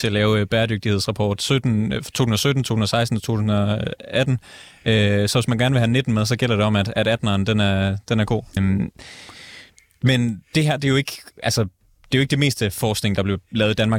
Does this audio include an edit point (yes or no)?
yes